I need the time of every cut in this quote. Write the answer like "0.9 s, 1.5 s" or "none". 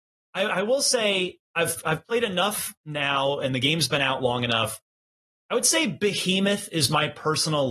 none